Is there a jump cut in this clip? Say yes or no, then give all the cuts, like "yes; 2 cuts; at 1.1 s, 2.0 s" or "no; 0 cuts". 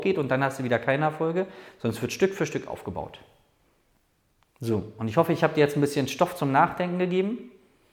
no; 0 cuts